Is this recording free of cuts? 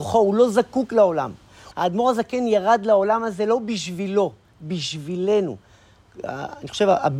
no; 1 cut; at 1.7 s

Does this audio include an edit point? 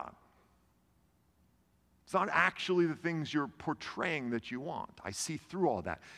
no; 0 cuts

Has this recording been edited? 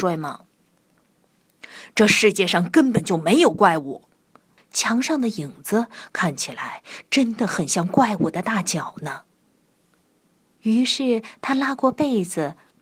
yes; 1 cut; at 4.6 s

